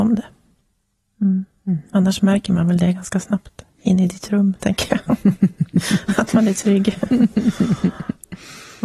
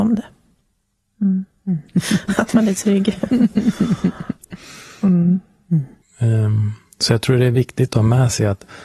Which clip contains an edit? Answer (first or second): second